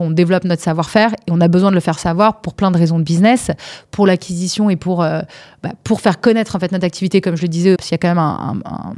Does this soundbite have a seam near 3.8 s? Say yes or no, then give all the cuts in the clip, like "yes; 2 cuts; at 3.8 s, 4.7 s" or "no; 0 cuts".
no; 1 cut; at 7.8 s